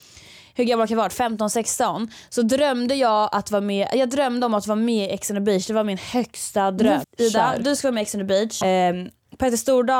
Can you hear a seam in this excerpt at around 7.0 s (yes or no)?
yes